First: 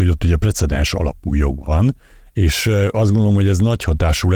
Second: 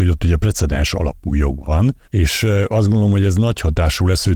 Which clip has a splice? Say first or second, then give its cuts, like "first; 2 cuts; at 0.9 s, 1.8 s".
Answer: second; 1 cut; at 2.0 s